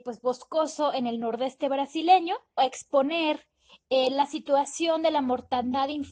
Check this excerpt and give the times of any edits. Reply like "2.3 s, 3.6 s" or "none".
2.6 s